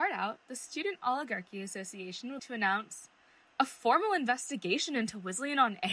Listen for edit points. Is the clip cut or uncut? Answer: cut